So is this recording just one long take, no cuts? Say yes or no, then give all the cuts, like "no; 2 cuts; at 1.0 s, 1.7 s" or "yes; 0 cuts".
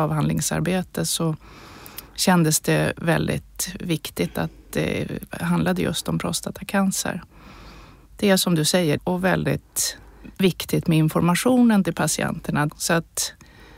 no; 2 cuts; at 9.0 s, 12.7 s